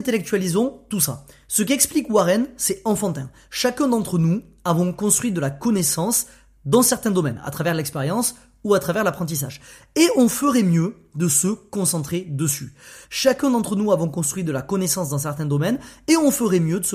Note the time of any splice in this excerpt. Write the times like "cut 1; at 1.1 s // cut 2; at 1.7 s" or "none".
cut 1; at 13.0 s